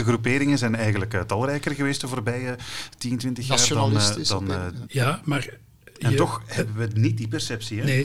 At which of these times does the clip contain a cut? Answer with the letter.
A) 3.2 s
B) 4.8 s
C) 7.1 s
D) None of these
B